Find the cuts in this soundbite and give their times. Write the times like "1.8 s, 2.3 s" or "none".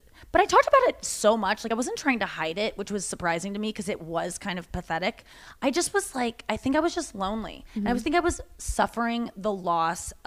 none